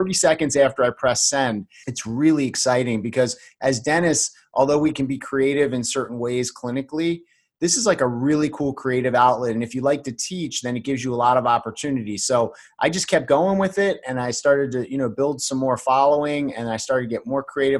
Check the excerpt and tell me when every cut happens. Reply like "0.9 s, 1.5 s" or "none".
1.8 s